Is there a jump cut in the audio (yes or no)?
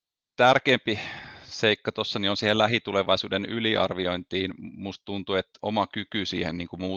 yes